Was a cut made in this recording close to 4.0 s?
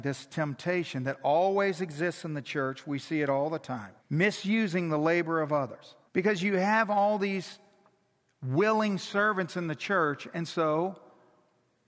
yes; 2 cuts; at 4.0 s, 6.1 s

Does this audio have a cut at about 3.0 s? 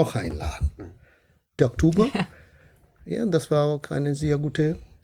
no; 1 cut; at 1.6 s

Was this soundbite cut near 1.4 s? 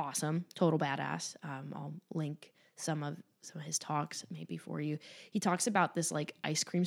no; 0 cuts

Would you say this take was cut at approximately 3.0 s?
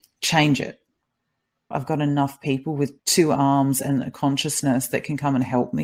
yes; 2 cuts; at 1.7 s, 3.0 s

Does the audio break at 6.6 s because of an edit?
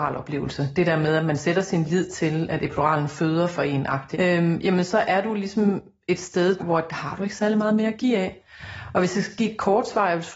yes; 2 cuts; at 4.1 s, 6.6 s

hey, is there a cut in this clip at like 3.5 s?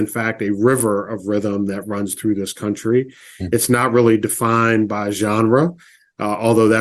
no; 0 cuts

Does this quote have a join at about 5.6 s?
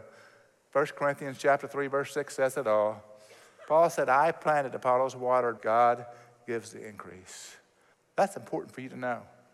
yes; 2 cuts; at 5.6 s, 7.9 s

